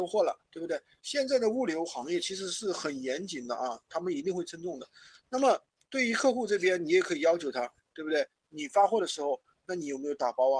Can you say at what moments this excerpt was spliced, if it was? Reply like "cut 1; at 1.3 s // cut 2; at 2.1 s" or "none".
cut 1; at 1.0 s